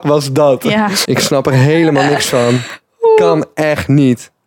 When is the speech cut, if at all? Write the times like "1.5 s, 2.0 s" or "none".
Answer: 1.0 s